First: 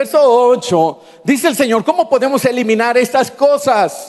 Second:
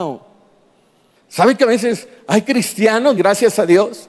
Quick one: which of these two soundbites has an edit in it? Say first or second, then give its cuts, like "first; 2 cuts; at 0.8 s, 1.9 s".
second; 2 cuts; at 1.2 s, 3.2 s